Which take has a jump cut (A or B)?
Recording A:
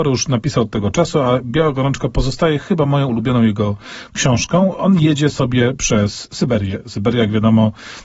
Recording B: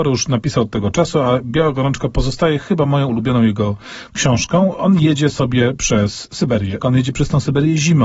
B